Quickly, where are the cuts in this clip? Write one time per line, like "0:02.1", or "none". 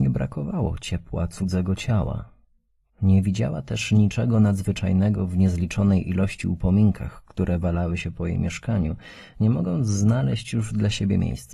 0:02.9